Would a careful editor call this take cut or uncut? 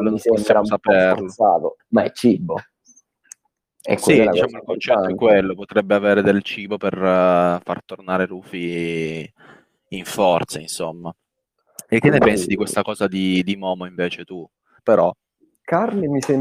cut